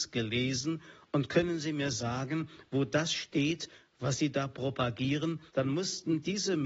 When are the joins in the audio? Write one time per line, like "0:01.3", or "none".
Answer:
0:05.5